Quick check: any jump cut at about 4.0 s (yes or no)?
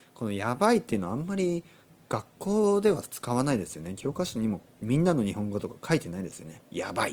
no